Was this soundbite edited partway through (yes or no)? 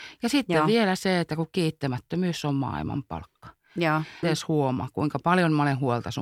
yes